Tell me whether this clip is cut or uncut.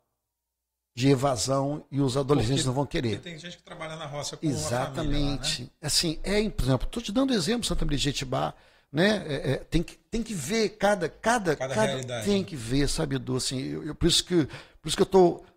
uncut